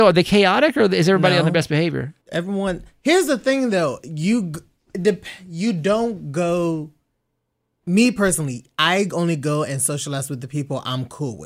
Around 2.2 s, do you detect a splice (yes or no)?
yes